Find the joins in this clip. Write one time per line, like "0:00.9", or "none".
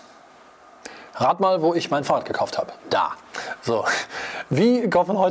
0:02.8

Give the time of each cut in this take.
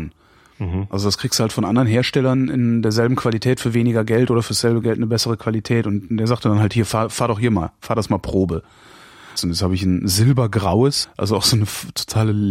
0:09.4
0:11.0

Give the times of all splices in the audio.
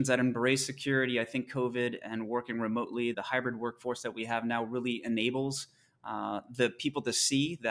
0:03.1

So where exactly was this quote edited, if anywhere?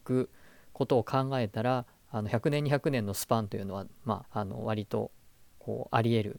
0:04.2

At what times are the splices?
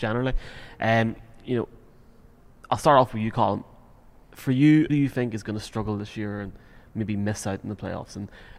0:04.9

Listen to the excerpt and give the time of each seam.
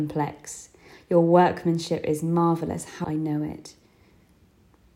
0:03.0

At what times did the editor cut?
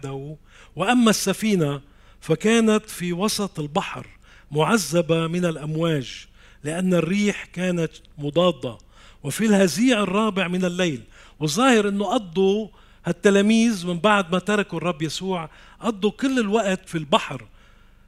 0:16.9

